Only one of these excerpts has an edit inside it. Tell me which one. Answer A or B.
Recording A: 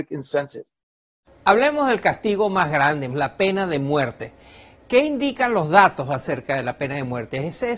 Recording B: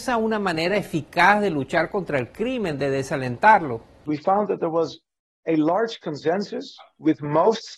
A